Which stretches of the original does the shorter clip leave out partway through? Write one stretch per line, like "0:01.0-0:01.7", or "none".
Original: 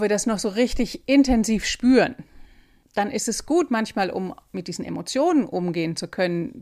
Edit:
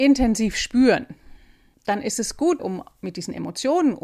0:03.7-0:04.1